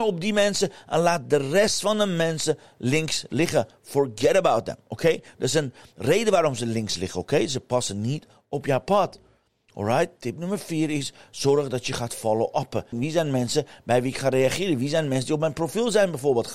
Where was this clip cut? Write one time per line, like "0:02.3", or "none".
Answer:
0:12.9